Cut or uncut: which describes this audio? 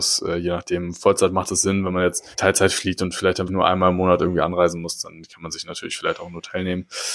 cut